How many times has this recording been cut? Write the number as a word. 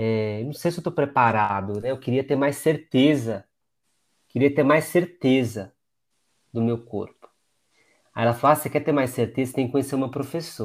zero